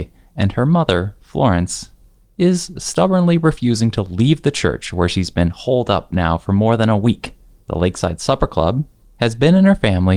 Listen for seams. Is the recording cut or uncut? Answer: uncut